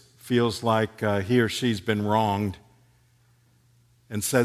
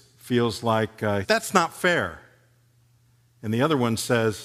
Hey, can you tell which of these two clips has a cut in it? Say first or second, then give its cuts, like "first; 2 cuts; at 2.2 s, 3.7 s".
second; 1 cut; at 1.2 s